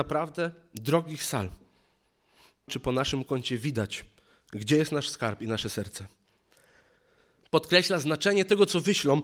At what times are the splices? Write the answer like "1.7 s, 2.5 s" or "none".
2.7 s, 7.4 s